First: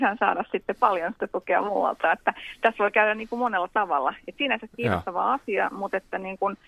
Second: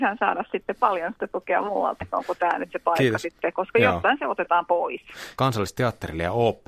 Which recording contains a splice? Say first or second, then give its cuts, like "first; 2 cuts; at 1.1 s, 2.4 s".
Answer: second; 2 cuts; at 2.0 s, 5.4 s